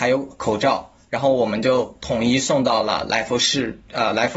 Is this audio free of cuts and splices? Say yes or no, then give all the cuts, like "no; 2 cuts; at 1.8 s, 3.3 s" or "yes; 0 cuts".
yes; 0 cuts